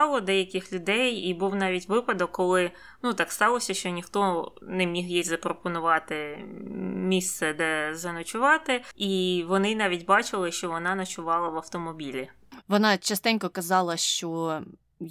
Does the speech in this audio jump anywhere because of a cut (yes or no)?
yes